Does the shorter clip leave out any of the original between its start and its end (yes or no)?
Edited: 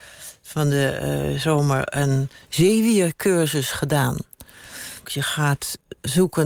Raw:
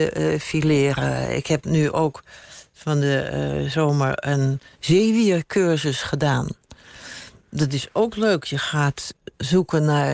yes